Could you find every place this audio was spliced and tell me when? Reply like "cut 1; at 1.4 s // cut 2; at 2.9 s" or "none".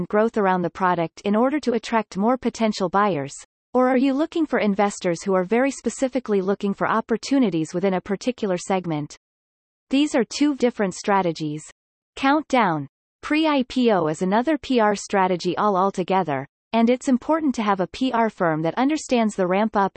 cut 1; at 10.6 s // cut 2; at 13.1 s